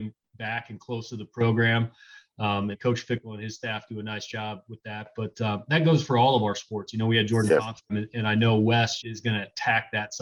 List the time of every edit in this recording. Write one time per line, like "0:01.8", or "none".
0:02.7
0:07.9
0:09.0

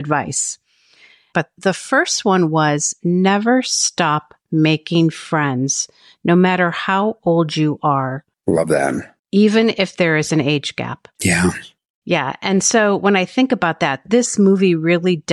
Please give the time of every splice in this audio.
none

